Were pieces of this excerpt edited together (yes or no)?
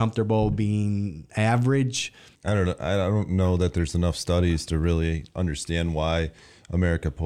no